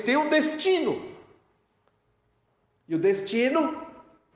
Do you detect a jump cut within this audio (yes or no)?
no